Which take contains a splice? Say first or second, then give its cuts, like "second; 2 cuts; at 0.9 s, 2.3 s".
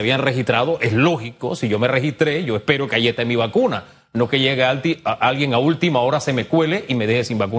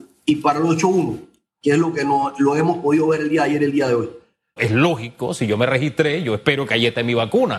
second; 1 cut; at 4.6 s